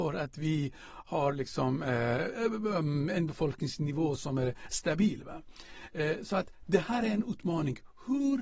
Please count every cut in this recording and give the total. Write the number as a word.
zero